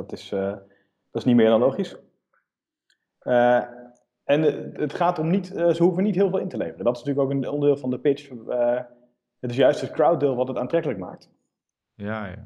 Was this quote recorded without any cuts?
yes; 0 cuts

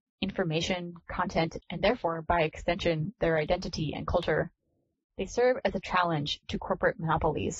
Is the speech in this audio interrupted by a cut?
yes; 1 cut; at 1.6 s

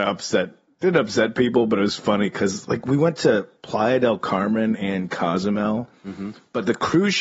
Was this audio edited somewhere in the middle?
no; 0 cuts

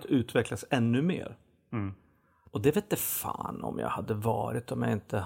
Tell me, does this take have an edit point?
no; 0 cuts

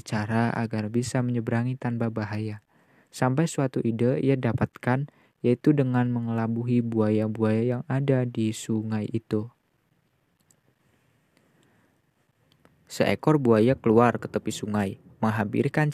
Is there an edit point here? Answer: no; 0 cuts

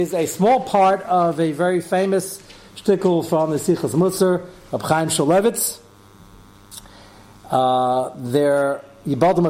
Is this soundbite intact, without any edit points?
yes; 0 cuts

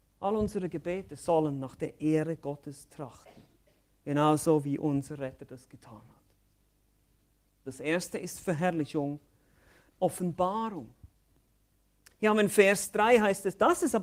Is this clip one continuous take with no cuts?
no; 2 cuts; at 7.7 s, 9.9 s

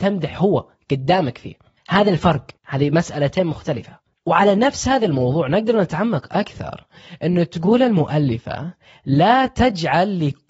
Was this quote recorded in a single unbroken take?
no; 1 cut; at 2.6 s

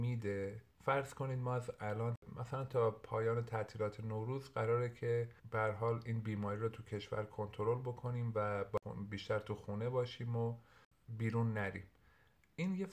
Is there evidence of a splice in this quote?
yes; 1 cut; at 5.4 s

